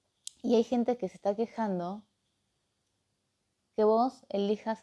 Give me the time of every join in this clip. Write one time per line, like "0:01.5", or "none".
none

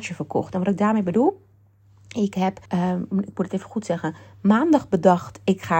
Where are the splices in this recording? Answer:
0:02.7

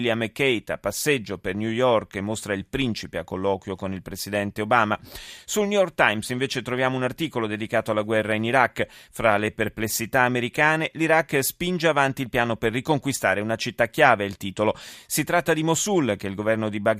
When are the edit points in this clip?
none

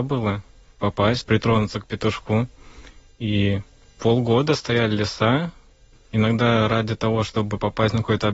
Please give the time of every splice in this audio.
0:01.2
0:05.9

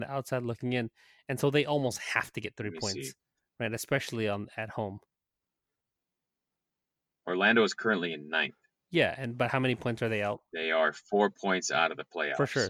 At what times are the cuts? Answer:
none

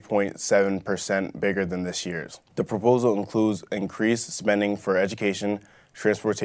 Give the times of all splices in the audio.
0:02.5

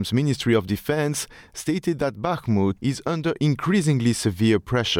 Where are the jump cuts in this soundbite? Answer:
0:02.8

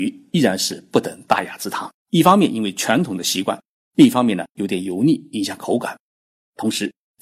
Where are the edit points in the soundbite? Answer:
0:02.0
0:04.6

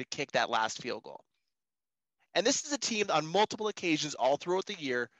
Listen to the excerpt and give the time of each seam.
none

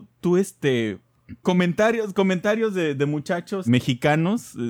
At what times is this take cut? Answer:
0:01.4
0:03.7

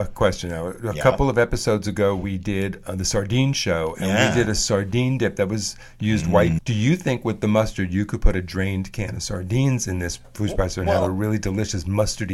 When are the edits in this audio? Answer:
0:06.6

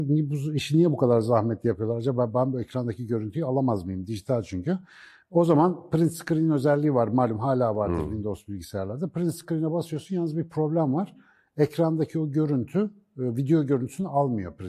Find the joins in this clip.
none

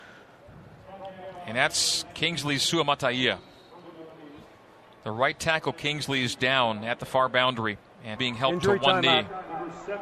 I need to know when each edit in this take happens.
0:08.2

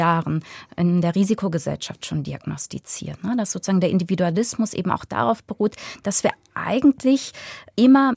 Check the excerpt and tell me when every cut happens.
none

